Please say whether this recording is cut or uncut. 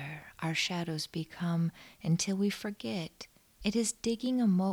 cut